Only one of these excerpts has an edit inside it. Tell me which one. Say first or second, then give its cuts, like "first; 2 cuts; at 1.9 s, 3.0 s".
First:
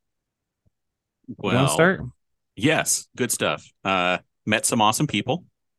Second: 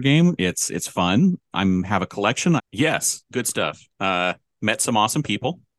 second; 1 cut; at 2.6 s